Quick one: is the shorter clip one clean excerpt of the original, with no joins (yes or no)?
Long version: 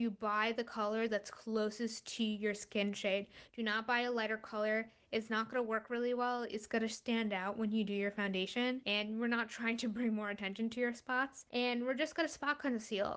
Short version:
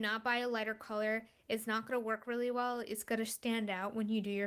yes